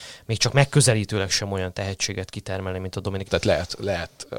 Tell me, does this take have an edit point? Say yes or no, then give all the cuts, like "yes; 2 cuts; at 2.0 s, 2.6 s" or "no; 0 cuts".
yes; 1 cut; at 3.2 s